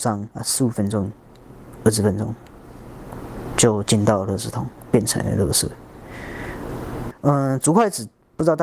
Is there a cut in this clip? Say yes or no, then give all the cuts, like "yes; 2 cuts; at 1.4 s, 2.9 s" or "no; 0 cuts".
yes; 1 cut; at 7.1 s